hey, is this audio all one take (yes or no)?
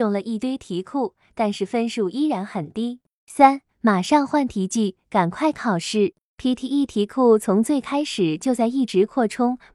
yes